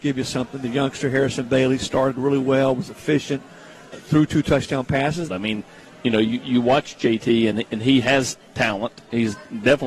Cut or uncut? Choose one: cut